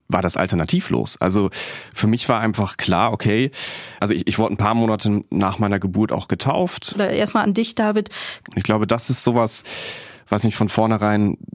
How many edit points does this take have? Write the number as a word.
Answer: three